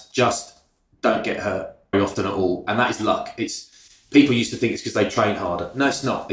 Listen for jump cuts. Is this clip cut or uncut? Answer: cut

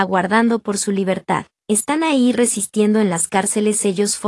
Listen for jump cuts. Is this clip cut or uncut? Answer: uncut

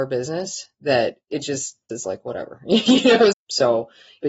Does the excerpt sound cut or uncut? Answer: cut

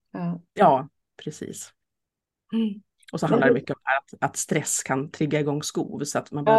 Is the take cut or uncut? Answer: uncut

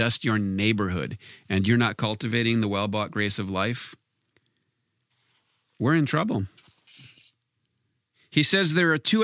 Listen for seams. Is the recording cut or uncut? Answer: uncut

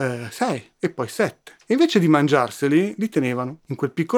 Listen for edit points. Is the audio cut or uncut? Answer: uncut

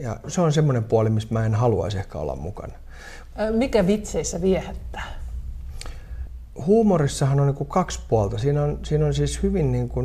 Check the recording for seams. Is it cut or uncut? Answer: cut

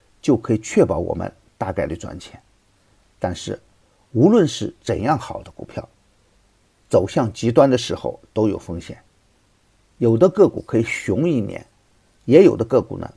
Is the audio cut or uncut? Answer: uncut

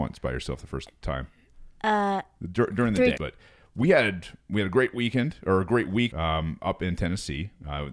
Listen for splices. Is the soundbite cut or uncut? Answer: cut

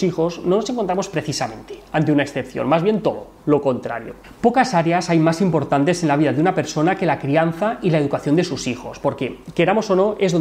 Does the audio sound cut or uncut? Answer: uncut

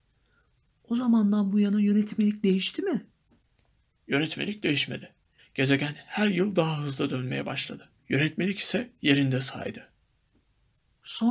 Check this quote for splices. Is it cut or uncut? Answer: cut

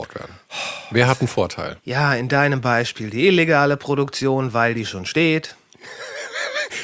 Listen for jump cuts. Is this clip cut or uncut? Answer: cut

